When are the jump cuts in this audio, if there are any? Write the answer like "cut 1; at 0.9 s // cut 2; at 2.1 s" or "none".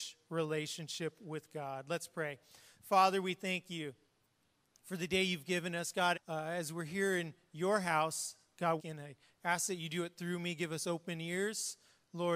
cut 1; at 6.1 s // cut 2; at 8.8 s